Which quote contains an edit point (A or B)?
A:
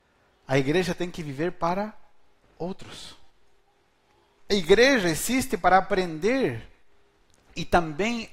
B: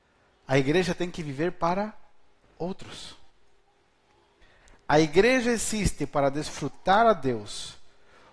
A